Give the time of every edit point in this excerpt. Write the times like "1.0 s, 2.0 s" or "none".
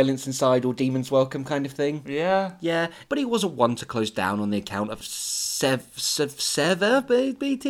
3.1 s, 5.0 s